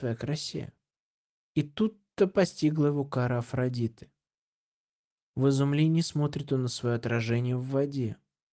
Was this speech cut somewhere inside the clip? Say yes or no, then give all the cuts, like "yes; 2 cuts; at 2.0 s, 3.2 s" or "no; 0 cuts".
no; 0 cuts